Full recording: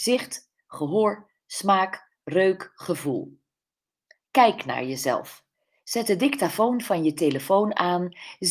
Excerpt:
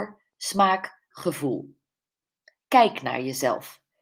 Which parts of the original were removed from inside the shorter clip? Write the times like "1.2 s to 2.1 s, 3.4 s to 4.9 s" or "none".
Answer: 2.2 s to 2.7 s